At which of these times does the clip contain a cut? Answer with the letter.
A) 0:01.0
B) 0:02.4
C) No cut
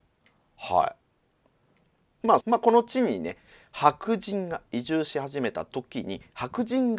B